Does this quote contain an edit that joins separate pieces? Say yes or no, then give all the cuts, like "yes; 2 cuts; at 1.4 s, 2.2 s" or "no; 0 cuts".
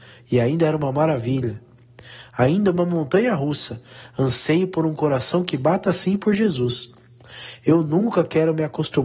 no; 0 cuts